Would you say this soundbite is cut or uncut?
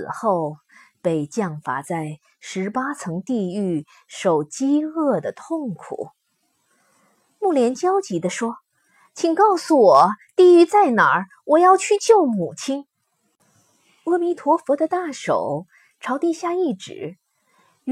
uncut